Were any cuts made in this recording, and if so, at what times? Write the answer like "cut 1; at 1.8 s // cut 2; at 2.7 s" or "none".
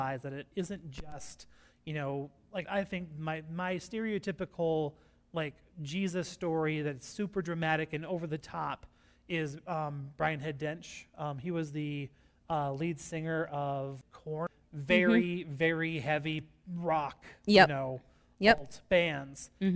cut 1; at 2.6 s